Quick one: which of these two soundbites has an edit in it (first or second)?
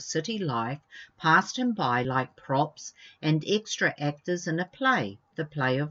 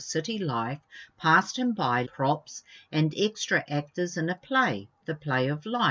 second